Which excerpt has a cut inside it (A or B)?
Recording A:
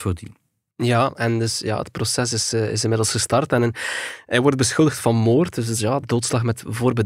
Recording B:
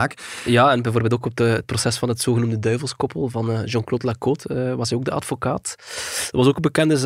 A